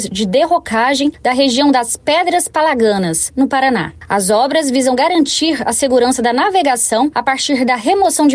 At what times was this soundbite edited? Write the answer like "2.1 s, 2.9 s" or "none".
3.3 s